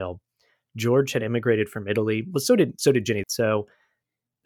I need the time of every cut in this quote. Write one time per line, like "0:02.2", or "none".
0:03.2